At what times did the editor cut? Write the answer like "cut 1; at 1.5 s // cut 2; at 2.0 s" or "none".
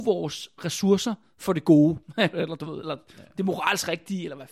cut 1; at 2.3 s